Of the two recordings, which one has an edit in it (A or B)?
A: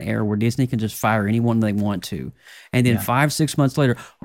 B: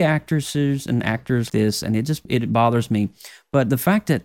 B